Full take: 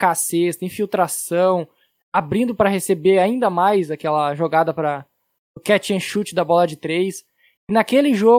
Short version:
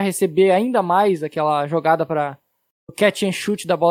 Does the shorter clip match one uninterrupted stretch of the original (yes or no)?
yes